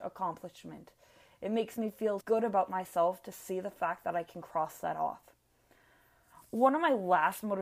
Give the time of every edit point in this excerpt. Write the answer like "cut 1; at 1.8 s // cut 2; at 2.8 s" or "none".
cut 1; at 2.2 s